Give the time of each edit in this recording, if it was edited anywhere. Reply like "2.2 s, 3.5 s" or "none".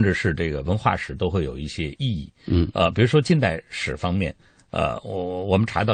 none